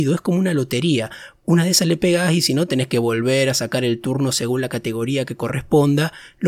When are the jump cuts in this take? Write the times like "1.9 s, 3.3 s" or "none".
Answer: none